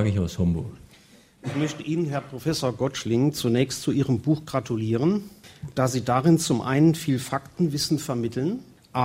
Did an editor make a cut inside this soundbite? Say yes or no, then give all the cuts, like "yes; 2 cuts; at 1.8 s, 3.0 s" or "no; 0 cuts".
no; 0 cuts